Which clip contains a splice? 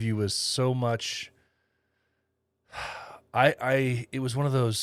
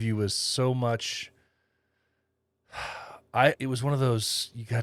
second; 1 cut; at 3.6 s

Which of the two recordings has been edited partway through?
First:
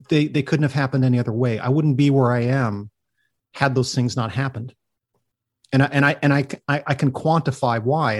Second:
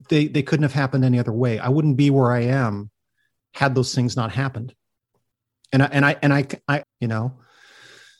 second; 1 cut; at 6.8 s

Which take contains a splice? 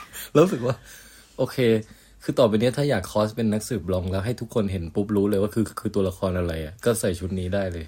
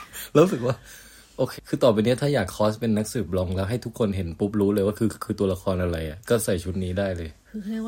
second; 1 cut; at 1.6 s

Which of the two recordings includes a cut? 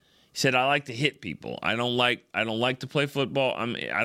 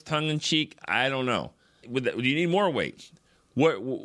second; 1 cut; at 1.8 s

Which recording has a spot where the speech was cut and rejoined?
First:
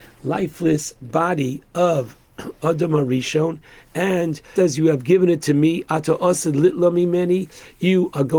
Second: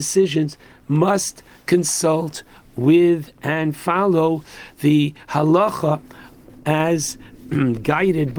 first; 1 cut; at 4.6 s

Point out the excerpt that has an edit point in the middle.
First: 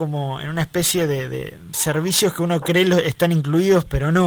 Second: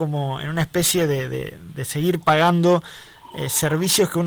first; 1 cut; at 1.7 s

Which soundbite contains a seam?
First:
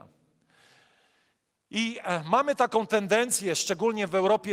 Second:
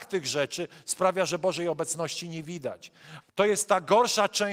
second; 1 cut; at 3.2 s

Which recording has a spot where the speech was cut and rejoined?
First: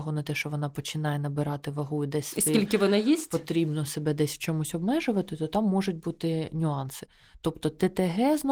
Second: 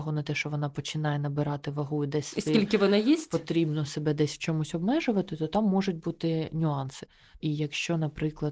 second; 1 cut; at 7.4 s

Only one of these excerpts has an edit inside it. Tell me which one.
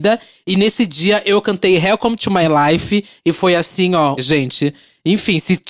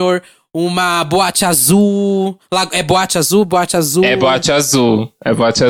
first; 1 cut; at 4.2 s

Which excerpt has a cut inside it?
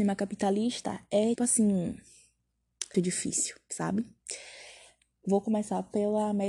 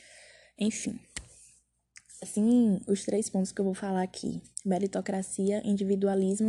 first; 2 cuts; at 1.4 s, 2.9 s

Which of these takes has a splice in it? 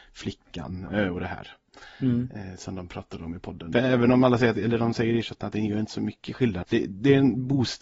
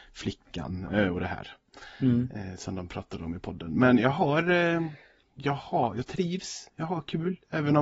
first; 2 cuts; at 3.7 s, 6.6 s

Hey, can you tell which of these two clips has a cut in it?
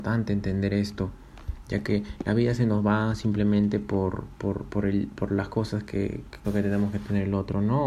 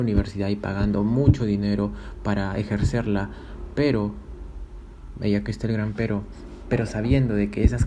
first; 1 cut; at 6.4 s

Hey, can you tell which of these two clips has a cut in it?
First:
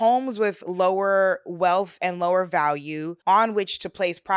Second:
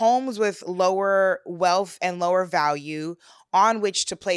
first; 1 cut; at 3.2 s

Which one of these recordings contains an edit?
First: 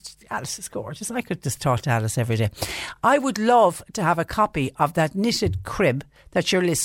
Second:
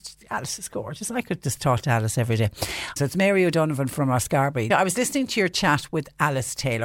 second; 2 cuts; at 3.0 s, 4.7 s

